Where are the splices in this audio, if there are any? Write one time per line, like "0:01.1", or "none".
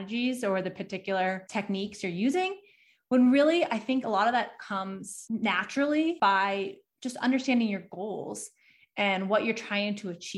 none

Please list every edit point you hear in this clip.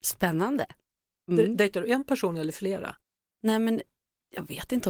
0:03.3

